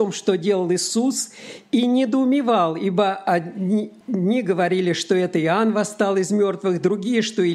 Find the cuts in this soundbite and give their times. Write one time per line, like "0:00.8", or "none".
0:04.0